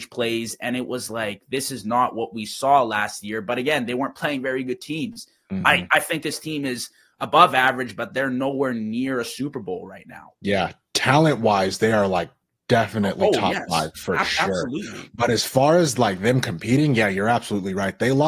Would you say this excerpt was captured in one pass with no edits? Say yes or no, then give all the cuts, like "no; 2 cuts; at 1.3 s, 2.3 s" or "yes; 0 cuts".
yes; 0 cuts